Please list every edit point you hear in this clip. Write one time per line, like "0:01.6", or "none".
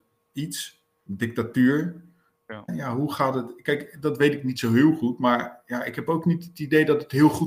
0:01.1
0:02.7